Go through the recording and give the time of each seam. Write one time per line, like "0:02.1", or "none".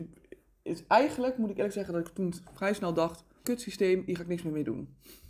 0:03.4